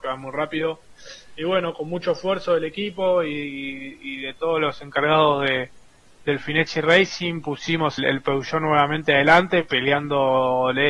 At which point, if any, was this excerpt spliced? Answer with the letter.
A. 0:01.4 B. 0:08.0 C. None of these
B